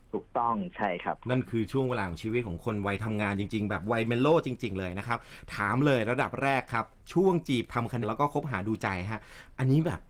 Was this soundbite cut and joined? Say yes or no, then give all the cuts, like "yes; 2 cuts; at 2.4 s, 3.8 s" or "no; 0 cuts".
yes; 1 cut; at 8.0 s